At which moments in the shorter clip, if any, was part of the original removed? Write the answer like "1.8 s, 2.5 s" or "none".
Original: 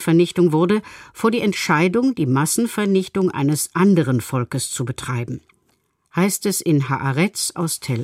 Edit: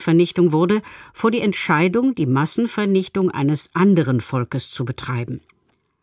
none